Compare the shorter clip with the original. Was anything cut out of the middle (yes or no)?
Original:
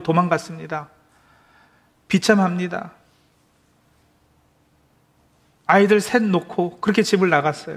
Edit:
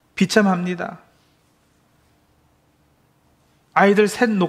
no